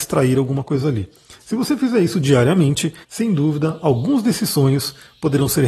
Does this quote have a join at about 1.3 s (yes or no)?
no